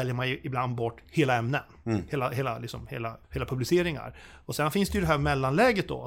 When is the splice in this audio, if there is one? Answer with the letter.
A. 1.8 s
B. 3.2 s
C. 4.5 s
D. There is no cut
B